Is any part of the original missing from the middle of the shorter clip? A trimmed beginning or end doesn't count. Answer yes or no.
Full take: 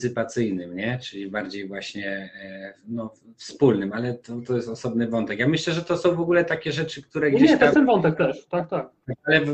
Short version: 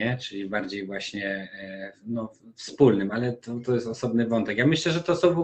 no